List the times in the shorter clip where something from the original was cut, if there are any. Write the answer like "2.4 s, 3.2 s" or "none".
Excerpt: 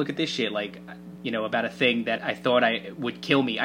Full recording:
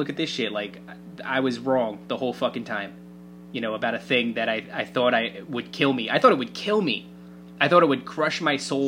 1.2 s, 2.2 s